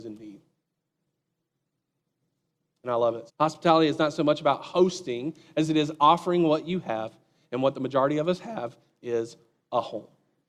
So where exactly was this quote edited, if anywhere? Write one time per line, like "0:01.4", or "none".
0:03.3